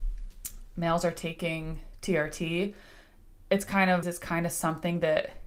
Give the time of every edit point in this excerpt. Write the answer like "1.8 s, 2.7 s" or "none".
4.0 s